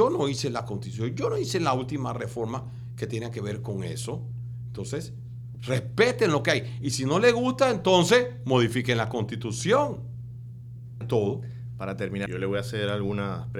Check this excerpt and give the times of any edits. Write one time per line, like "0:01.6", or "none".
0:11.0
0:12.3